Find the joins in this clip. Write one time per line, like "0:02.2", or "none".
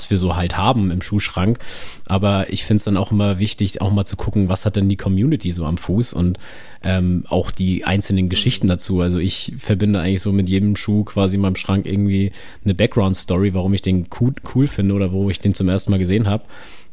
none

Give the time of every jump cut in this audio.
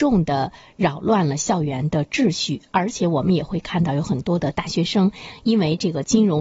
none

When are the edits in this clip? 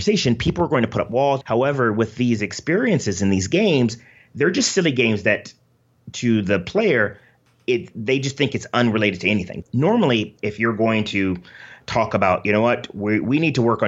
0:01.4
0:09.6

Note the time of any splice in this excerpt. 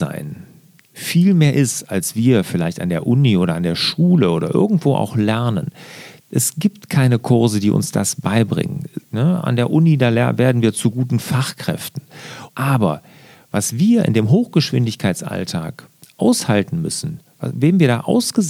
0:09.1
0:12.5

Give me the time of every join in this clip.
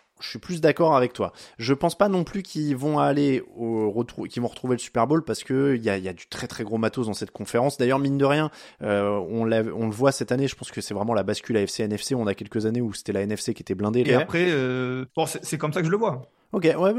0:14.0
0:15.1

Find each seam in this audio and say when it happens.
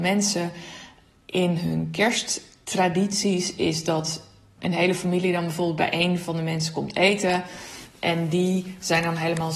0:04.6

